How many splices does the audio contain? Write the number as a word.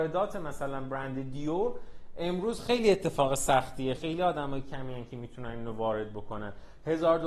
one